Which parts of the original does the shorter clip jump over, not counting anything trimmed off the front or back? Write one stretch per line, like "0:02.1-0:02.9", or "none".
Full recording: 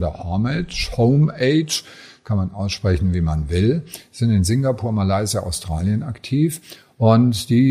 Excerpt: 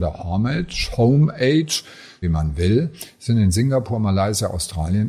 0:02.2-0:03.1